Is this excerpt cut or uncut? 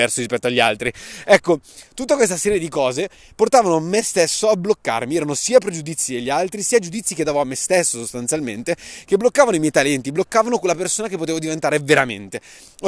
uncut